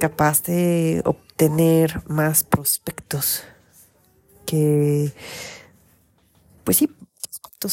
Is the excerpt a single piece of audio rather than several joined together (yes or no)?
yes